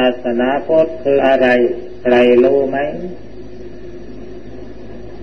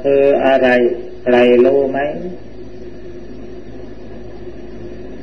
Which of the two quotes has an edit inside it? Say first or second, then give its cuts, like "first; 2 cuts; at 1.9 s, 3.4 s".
first; 1 cut; at 1.2 s